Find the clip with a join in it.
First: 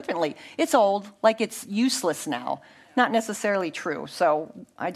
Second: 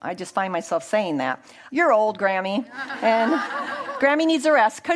second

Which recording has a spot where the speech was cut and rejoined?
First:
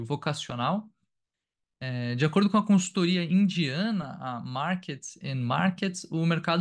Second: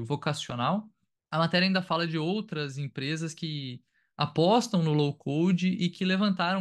second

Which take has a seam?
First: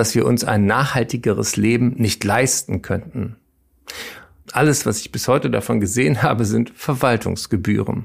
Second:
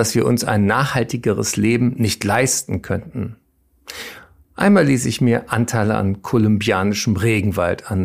first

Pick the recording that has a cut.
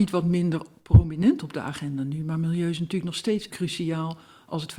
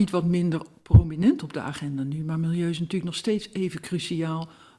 first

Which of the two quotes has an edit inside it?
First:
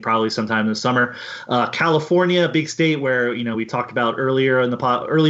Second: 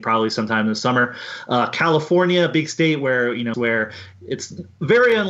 second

